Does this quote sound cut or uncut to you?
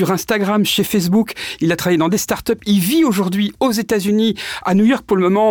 uncut